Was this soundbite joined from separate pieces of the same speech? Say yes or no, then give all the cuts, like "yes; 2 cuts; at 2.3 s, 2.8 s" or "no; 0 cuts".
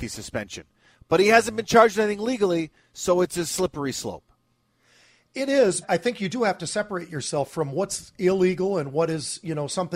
yes; 1 cut; at 5.8 s